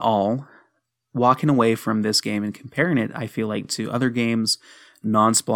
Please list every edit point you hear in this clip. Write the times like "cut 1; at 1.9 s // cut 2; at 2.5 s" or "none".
none